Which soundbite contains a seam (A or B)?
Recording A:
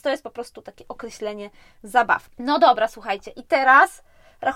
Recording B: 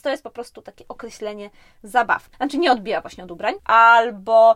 B